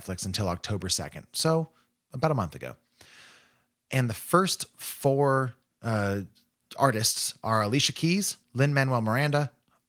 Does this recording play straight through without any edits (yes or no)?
no